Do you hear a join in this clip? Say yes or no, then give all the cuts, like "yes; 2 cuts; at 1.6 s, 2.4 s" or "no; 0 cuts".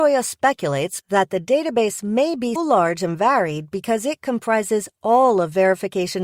yes; 2 cuts; at 1.0 s, 2.6 s